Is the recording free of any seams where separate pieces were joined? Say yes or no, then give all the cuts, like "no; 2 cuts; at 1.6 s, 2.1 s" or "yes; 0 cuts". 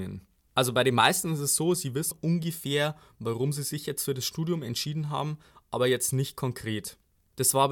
no; 1 cut; at 2.1 s